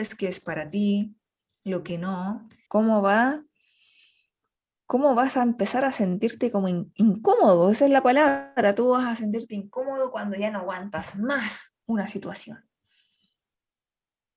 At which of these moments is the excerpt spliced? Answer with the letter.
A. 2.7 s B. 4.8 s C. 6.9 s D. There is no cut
A